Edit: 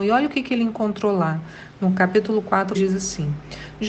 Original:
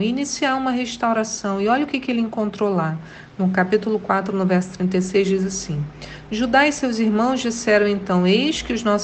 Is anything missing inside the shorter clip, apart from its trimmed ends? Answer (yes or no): yes